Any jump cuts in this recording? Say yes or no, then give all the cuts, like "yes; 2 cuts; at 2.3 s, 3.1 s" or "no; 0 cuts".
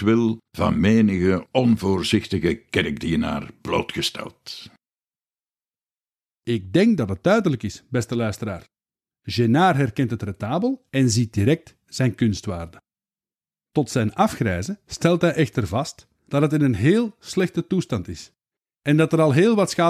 no; 0 cuts